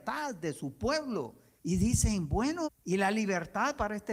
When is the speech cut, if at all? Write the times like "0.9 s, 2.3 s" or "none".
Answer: 1.6 s, 2.6 s